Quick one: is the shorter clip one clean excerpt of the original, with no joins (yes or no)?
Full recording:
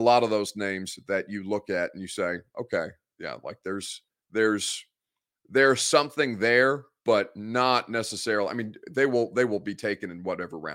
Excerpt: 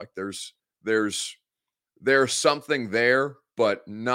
yes